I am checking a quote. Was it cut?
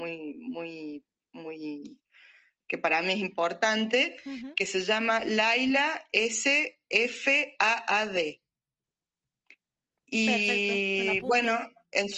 no; 0 cuts

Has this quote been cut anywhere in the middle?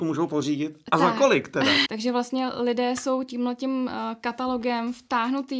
yes; 1 cut; at 1.8 s

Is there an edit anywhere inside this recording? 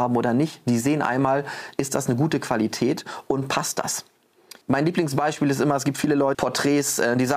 yes; 2 cuts; at 4.6 s, 6.3 s

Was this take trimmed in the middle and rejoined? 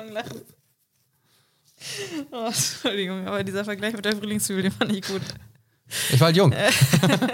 no; 0 cuts

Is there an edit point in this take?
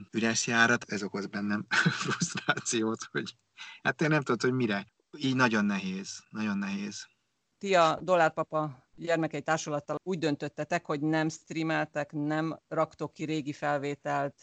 no; 0 cuts

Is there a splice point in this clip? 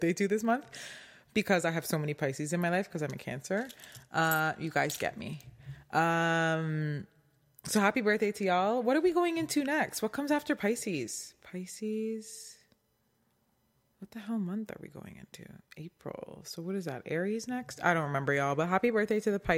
no; 0 cuts

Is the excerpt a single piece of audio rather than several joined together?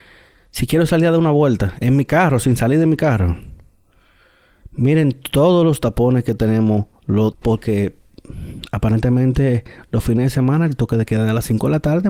no; 1 cut; at 7.3 s

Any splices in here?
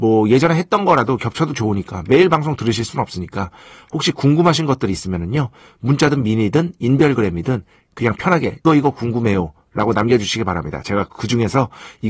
yes; 1 cut; at 8.6 s

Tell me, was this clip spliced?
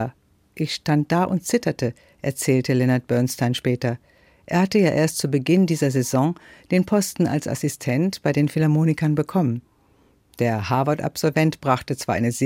no; 0 cuts

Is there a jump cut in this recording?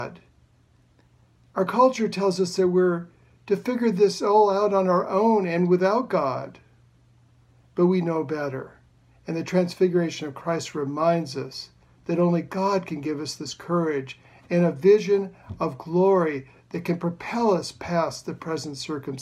no; 0 cuts

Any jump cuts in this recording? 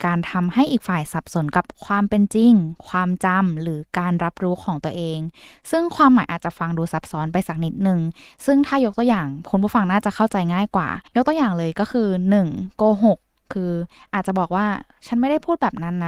yes; 1 cut; at 11.1 s

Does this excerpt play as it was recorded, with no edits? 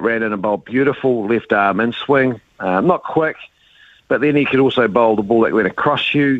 yes; 0 cuts

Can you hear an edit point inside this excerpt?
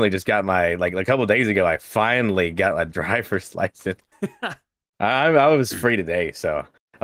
yes; 1 cut; at 4.1 s

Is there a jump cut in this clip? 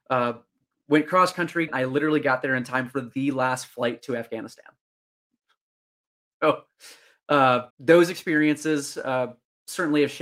yes; 2 cuts; at 1.7 s, 7.7 s

